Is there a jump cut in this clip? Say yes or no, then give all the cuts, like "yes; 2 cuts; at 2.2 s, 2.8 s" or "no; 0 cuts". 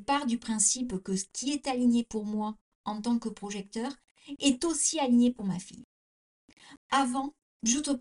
yes; 1 cut; at 6.8 s